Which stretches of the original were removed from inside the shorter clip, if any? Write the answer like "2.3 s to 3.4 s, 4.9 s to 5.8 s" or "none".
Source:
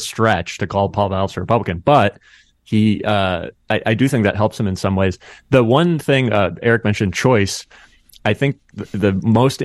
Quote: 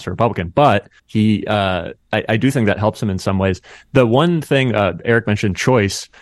2.3 s to 2.6 s